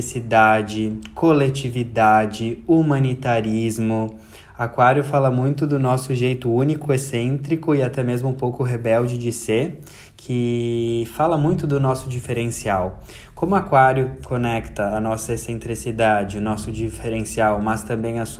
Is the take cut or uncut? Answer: uncut